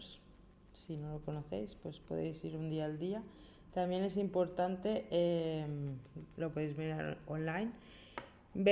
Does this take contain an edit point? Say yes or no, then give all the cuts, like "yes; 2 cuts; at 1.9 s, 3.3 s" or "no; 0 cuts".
no; 0 cuts